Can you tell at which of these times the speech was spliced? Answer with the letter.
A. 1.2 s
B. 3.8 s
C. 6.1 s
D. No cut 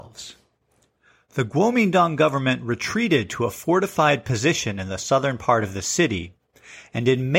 D